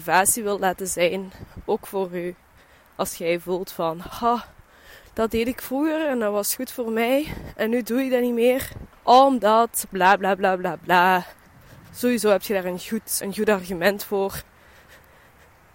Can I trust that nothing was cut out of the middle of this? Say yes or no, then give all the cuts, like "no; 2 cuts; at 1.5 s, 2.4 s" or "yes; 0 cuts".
no; 1 cut; at 13.2 s